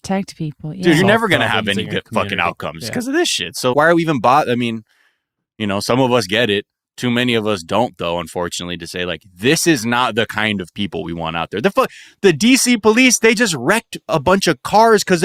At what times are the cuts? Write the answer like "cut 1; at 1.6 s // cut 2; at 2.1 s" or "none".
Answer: cut 1; at 3.7 s